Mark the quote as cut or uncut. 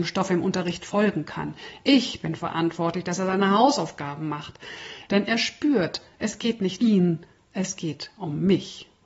cut